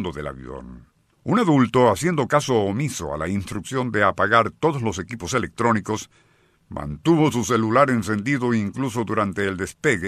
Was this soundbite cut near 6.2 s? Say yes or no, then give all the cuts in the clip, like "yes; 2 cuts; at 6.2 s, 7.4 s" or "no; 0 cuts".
no; 1 cut; at 1.1 s